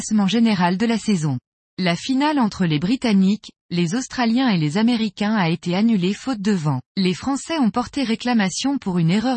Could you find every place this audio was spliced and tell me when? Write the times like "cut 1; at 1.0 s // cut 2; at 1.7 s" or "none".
cut 1; at 1.6 s // cut 2; at 6.9 s